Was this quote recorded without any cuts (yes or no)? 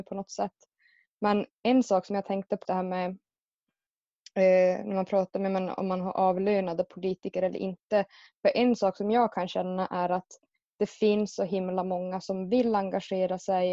no